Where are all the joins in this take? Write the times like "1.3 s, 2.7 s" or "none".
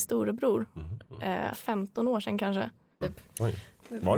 1.5 s, 3.0 s